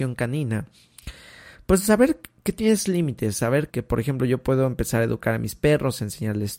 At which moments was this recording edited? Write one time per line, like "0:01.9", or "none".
0:03.7